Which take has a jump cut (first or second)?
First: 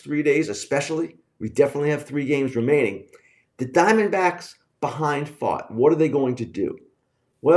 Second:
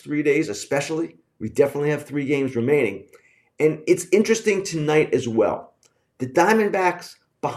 first